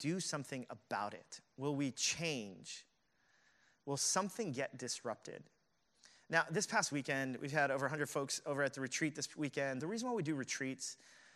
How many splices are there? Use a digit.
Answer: 1